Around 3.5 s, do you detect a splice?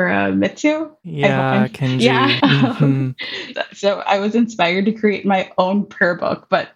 yes; 2 cuts; at 2.4 s, 3.5 s

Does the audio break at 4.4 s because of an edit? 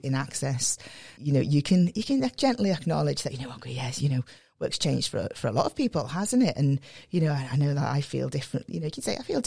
no; 1 cut; at 1.1 s

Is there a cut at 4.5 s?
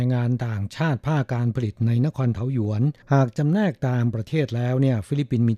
no; 1 cut; at 3.0 s

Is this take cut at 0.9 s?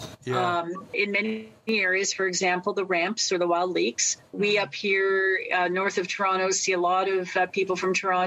yes; 2 cuts; at 0.9 s, 4.3 s

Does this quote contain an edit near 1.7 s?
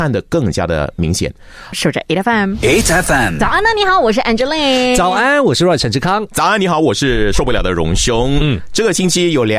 yes; 1 cut; at 1.7 s

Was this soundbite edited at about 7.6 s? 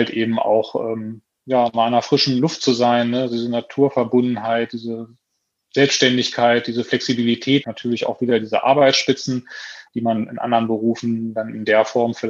yes; 1 cut; at 7.6 s

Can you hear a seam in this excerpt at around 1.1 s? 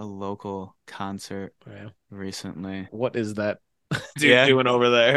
no; 2 cuts; at 2.9 s, 4.2 s

